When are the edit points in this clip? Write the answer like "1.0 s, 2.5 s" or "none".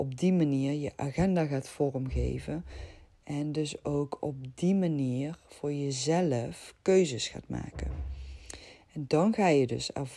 none